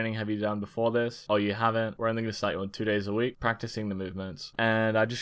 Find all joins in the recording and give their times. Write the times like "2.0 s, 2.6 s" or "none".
2.0 s, 3.3 s

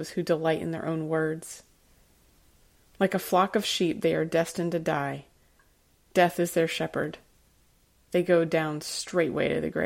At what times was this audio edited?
none

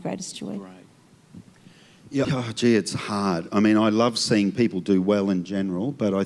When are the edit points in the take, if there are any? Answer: 2.2 s

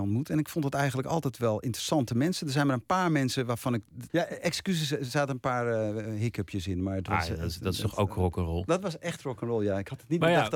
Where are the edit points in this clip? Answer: 4.1 s

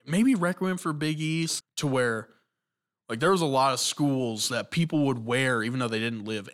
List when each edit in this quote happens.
1.6 s

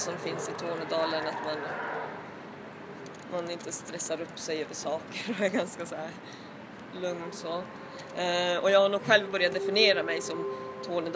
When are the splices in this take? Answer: 6.9 s

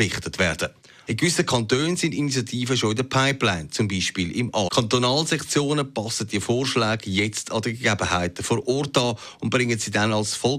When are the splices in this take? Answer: 1.1 s, 4.7 s

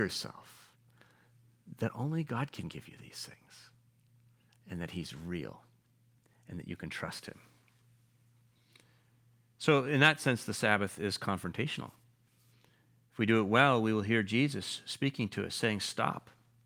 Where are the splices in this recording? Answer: none

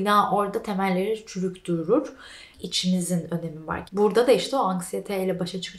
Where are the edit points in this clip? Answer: 2.5 s, 3.9 s

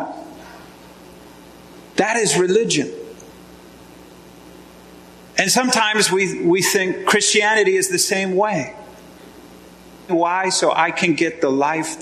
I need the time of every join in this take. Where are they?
10.1 s

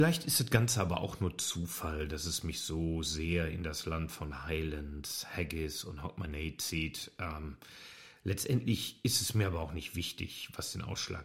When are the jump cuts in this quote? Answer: none

